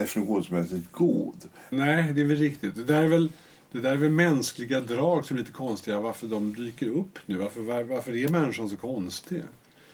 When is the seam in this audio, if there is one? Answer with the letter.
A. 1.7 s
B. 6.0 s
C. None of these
A